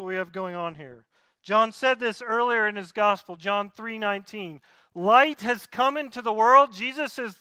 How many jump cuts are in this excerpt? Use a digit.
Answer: 0